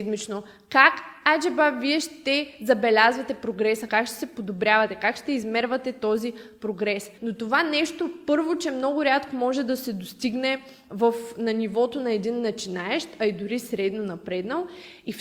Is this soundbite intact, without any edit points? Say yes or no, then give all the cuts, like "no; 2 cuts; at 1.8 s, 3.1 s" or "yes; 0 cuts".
no; 2 cuts; at 3.9 s, 7.2 s